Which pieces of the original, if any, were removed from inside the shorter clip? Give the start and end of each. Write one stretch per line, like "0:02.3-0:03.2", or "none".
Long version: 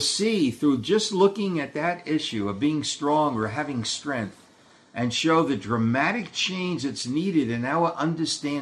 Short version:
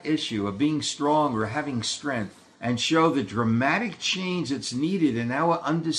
0:04.6-0:04.9